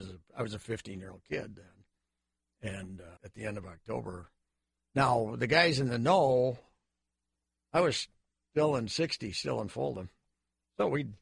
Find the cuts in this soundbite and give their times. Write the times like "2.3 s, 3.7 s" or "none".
3.2 s